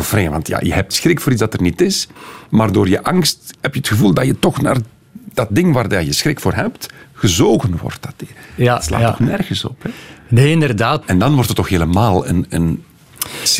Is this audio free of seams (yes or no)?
no